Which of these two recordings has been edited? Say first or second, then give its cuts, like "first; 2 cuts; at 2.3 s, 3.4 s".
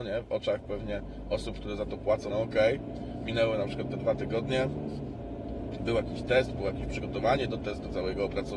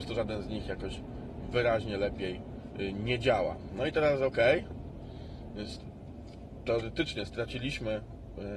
first; 1 cut; at 2.3 s